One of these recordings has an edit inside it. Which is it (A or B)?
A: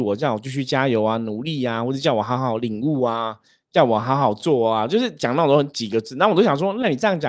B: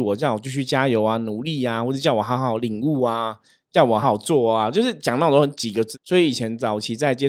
B